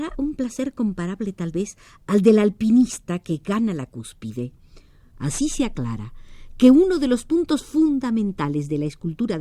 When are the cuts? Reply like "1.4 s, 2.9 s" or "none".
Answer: 5.1 s